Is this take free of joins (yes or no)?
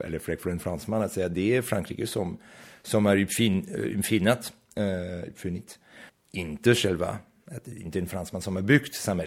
no